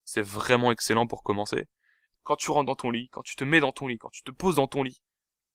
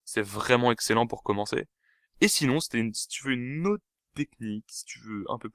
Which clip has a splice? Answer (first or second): first